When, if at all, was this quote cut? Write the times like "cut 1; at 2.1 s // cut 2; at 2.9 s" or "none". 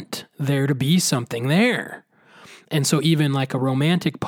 none